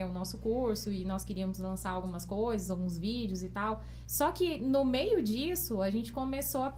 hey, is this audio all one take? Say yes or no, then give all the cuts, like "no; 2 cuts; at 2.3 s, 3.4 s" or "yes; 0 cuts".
no; 1 cut; at 4.0 s